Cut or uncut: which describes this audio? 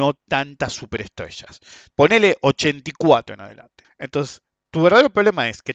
cut